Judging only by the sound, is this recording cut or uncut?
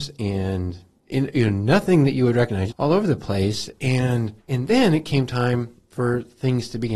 cut